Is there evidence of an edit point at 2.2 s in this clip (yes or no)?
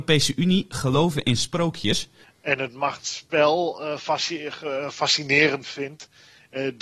yes